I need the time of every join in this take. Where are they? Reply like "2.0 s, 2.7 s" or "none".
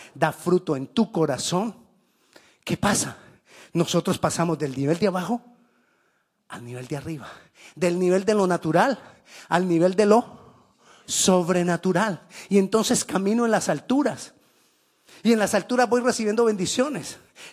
none